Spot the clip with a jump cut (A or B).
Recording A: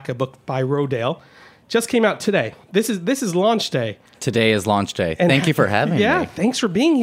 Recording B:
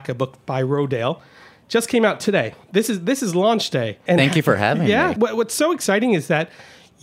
B